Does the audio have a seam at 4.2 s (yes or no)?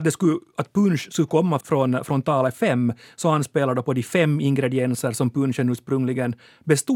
no